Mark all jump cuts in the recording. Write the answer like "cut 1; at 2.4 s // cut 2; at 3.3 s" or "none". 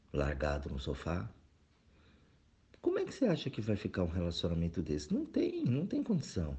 none